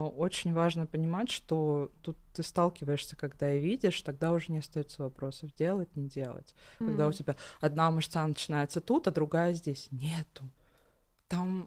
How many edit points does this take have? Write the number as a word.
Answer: two